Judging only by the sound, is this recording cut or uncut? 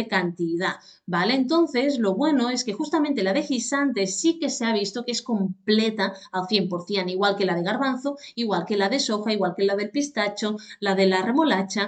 uncut